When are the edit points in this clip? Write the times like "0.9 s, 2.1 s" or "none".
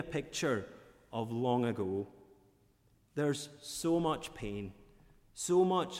none